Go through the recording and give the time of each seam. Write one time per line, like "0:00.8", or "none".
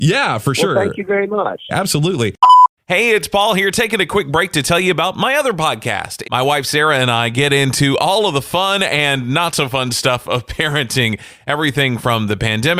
0:01.7
0:06.2